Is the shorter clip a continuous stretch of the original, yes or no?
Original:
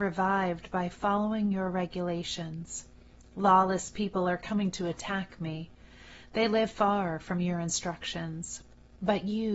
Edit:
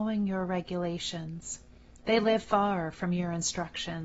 no